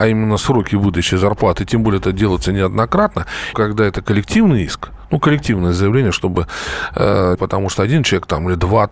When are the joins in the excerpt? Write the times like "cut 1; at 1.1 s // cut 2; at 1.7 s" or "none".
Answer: cut 1; at 3.5 s // cut 2; at 7.4 s